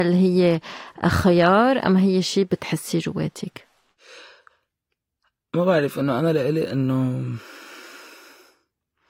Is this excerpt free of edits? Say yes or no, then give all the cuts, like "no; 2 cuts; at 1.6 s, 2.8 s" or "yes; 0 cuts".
yes; 0 cuts